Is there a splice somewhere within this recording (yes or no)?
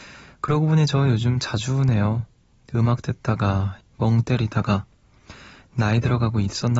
yes